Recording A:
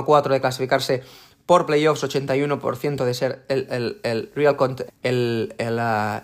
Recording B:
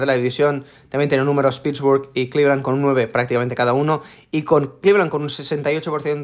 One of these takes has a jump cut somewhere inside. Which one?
A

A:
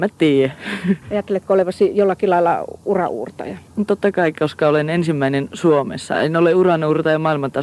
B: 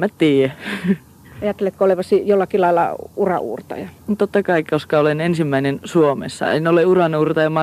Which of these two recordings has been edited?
A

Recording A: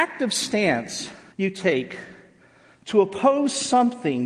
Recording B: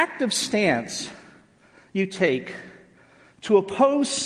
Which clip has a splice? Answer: A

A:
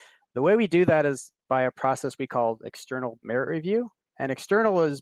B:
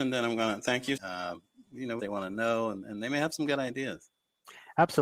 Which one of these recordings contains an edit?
B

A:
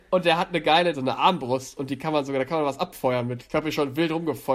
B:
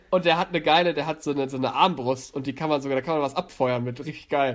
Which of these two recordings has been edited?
A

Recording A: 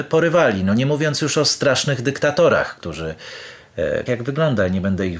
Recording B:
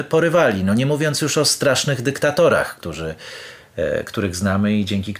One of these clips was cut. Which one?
A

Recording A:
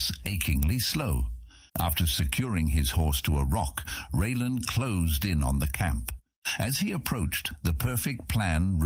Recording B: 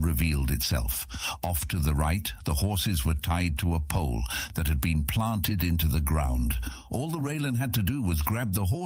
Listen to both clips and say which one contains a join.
A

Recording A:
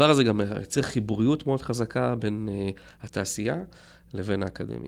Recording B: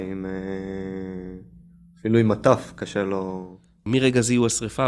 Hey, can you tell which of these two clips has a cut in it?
B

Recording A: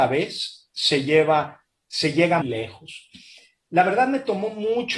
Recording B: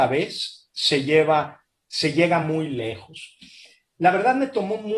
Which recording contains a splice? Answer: A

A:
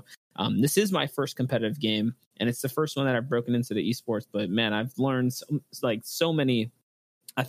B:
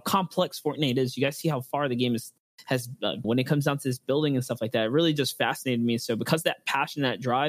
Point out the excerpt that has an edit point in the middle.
B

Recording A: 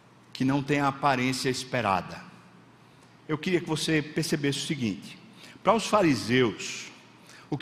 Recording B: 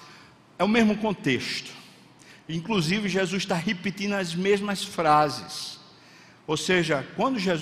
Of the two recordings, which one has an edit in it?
A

